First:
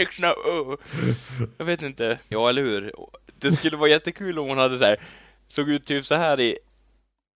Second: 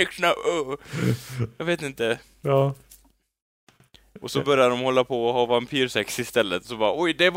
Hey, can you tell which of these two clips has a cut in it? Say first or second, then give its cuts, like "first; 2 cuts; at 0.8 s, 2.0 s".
first; 1 cut; at 2.3 s